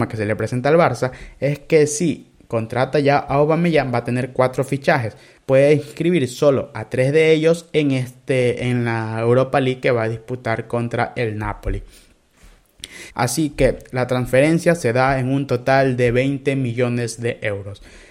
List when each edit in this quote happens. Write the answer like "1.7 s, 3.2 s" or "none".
5.4 s, 13.1 s